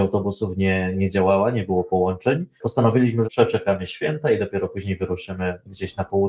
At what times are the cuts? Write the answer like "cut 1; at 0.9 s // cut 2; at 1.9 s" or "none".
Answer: cut 1; at 3.2 s